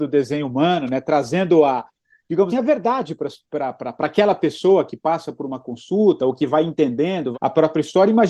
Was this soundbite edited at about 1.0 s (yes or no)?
no